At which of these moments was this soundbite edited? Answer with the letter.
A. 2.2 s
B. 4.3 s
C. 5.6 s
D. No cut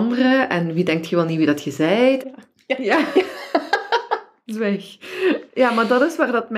A